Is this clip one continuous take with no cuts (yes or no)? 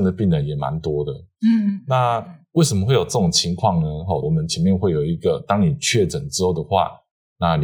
no